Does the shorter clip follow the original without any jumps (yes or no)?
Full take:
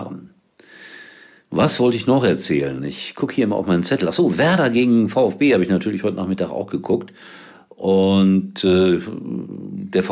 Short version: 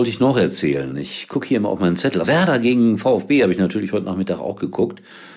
no